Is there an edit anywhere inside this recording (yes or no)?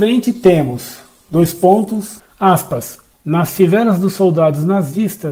yes